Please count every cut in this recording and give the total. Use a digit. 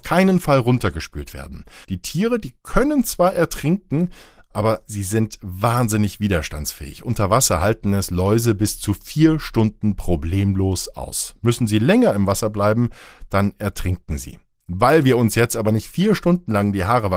1